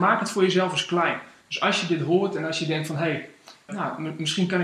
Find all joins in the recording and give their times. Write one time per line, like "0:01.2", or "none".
0:03.7